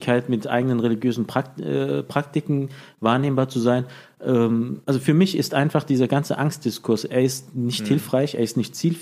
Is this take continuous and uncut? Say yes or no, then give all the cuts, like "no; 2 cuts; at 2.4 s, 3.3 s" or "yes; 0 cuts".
yes; 0 cuts